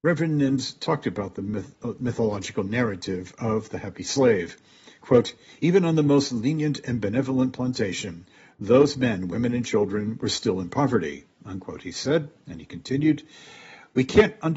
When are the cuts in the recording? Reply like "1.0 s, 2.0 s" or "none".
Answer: none